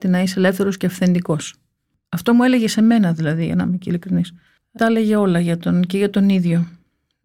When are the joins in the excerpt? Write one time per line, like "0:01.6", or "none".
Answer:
0:04.8